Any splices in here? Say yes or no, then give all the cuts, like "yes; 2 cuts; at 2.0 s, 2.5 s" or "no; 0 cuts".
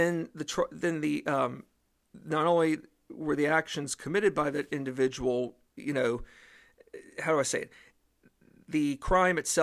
no; 0 cuts